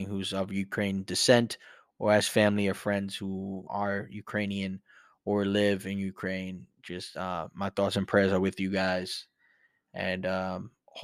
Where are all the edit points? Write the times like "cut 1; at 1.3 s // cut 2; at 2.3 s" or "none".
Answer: cut 1; at 3.7 s